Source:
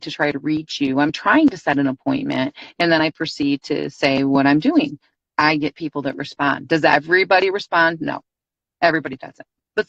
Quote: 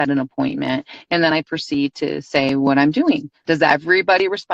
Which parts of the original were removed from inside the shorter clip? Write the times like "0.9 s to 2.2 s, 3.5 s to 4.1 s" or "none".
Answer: 5.1 s to 6.7 s